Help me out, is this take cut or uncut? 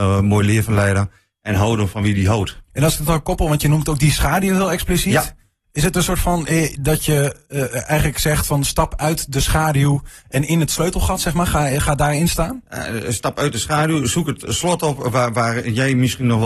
cut